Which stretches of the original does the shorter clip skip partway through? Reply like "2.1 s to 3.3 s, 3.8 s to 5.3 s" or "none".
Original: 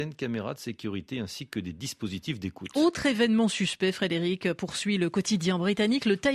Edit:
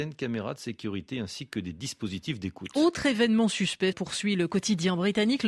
3.9 s to 4.5 s